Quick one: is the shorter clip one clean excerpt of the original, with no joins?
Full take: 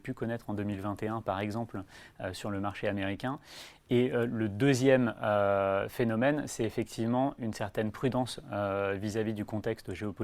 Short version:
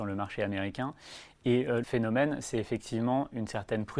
no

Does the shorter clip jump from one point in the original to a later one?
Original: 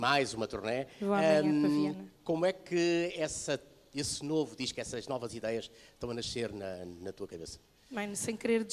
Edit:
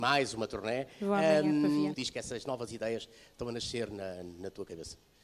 yes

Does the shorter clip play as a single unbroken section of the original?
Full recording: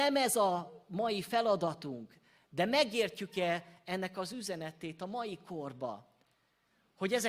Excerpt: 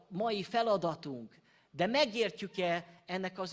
yes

